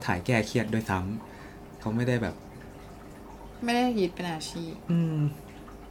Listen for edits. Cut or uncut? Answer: cut